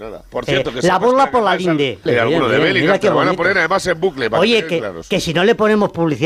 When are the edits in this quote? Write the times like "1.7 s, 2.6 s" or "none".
2.1 s